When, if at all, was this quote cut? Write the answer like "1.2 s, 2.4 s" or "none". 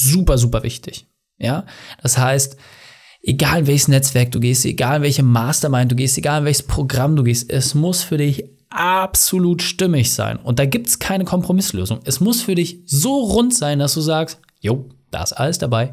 none